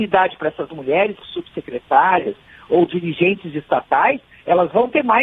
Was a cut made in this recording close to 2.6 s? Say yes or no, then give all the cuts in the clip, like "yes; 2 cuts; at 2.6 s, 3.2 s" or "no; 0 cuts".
no; 1 cut; at 1.2 s